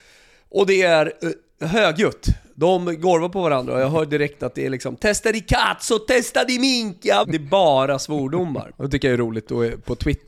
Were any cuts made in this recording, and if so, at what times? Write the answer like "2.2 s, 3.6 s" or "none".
7.2 s, 8.7 s

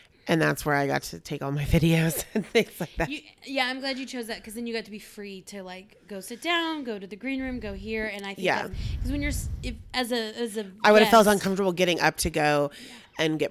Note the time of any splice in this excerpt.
none

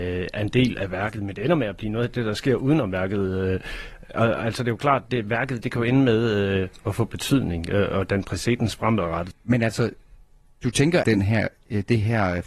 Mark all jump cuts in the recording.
9.3 s, 11.0 s

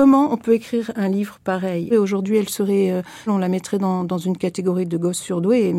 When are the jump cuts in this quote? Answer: 1.9 s, 3.3 s

